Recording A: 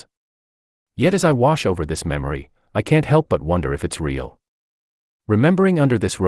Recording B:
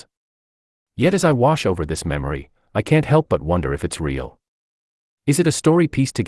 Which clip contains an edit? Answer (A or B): A